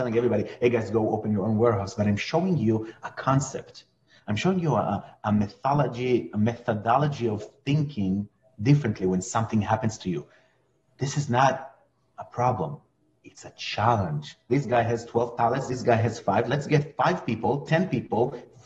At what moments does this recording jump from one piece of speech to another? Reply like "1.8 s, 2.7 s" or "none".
14.5 s